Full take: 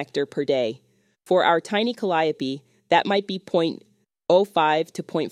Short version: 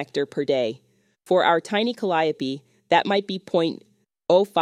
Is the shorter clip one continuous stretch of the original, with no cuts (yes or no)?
yes